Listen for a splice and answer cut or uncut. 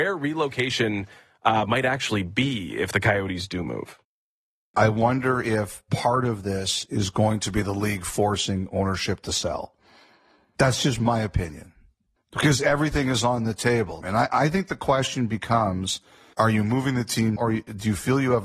cut